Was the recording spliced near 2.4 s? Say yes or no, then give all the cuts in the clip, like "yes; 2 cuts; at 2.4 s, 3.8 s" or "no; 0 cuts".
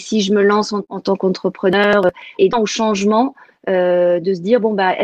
yes; 1 cut; at 2.4 s